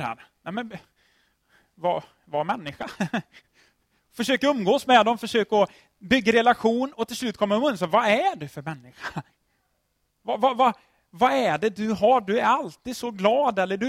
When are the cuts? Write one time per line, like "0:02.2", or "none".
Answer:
none